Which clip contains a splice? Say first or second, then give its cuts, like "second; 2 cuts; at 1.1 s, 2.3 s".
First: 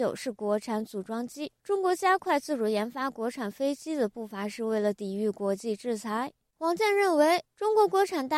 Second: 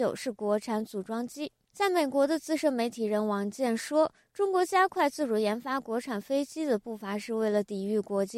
first; 2 cuts; at 1.6 s, 6.5 s